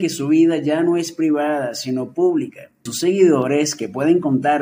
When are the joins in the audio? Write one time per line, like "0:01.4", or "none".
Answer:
0:02.9